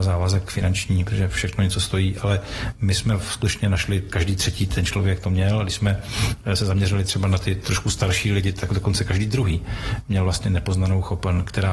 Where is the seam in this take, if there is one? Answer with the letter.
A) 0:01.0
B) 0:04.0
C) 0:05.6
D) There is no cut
D